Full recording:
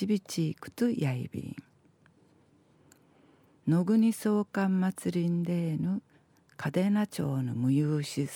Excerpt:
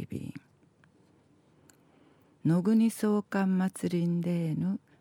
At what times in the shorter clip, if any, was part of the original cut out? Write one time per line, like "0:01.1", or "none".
none